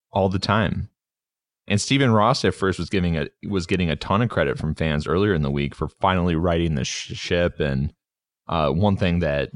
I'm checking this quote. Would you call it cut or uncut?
uncut